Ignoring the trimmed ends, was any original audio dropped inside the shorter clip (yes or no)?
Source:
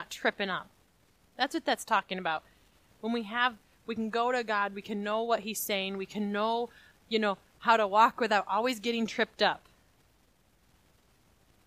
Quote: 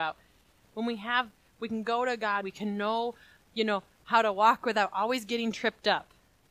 yes